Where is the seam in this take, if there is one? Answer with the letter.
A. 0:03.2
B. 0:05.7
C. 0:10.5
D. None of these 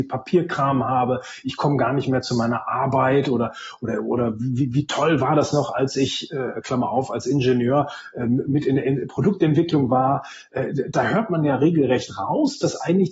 D